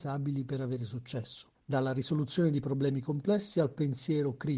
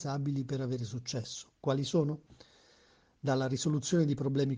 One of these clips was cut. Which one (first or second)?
first